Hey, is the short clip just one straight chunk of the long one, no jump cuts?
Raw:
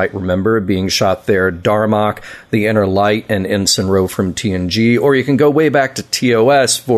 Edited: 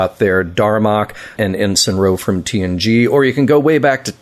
no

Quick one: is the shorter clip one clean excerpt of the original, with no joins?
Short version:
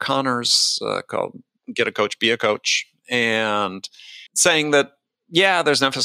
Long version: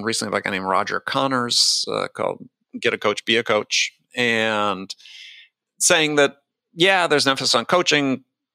no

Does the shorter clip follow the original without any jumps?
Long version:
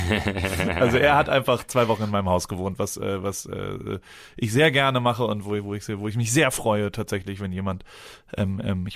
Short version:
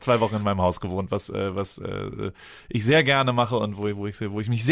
yes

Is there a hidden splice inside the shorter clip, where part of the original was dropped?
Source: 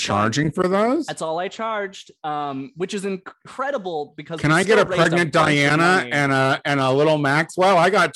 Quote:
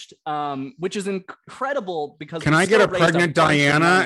no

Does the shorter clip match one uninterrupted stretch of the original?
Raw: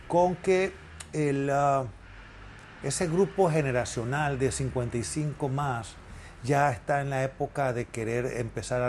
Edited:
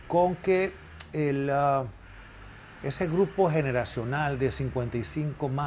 yes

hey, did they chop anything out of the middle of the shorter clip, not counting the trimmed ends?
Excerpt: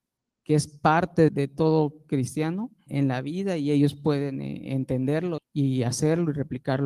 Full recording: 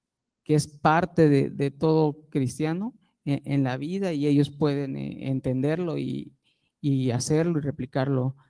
yes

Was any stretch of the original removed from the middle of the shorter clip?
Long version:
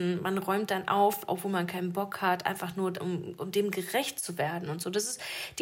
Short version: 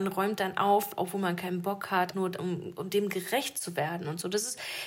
yes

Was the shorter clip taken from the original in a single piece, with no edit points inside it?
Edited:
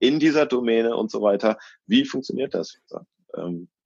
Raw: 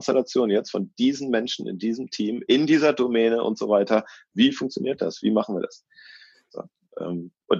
no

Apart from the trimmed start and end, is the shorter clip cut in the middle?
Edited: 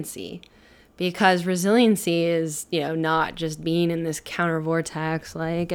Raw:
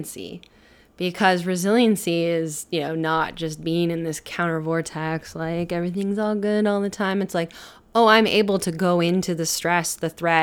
no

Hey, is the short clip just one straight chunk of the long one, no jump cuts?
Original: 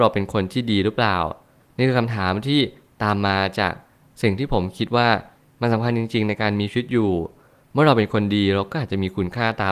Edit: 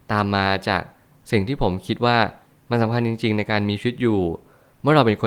yes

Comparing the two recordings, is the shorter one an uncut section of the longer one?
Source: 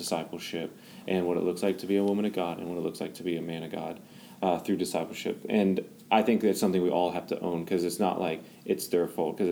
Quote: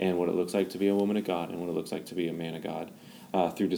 yes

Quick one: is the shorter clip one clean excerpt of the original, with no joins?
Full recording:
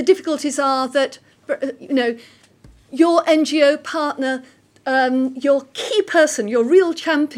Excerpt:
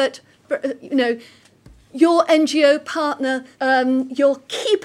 no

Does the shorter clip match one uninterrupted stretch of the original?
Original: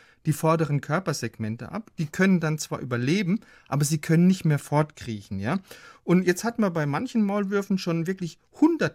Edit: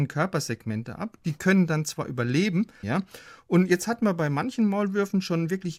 no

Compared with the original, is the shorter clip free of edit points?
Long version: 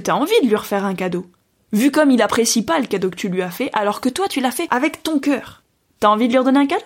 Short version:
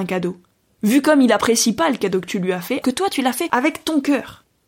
no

